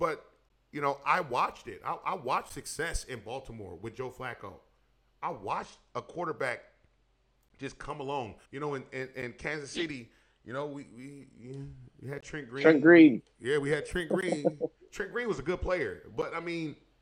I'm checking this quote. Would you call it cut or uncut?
cut